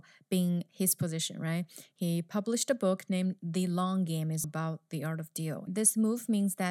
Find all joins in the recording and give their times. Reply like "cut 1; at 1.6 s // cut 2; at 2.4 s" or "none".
cut 1; at 4.4 s // cut 2; at 5.7 s